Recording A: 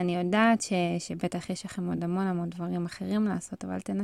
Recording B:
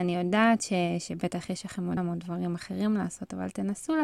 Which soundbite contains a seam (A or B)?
B